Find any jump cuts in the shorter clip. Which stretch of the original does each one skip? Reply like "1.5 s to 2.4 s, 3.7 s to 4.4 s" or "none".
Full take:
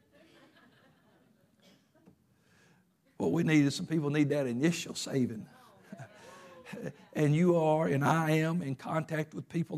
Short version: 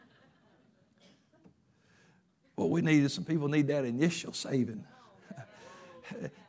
none